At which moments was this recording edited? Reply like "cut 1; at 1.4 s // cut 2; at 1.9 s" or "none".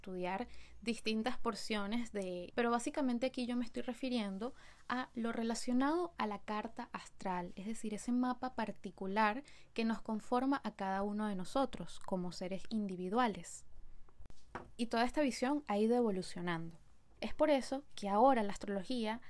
cut 1; at 2.5 s // cut 2; at 17.2 s